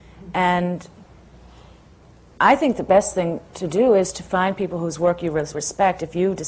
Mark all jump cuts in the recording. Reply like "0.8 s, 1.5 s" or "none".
5.5 s

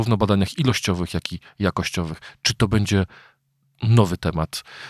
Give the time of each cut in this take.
none

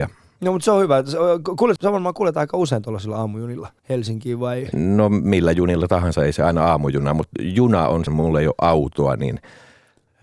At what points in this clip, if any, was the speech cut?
1.8 s, 3.8 s, 8.1 s

